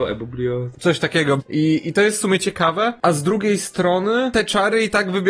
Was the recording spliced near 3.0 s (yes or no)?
no